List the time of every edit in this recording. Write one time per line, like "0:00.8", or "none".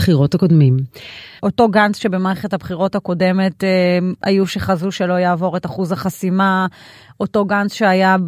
0:01.4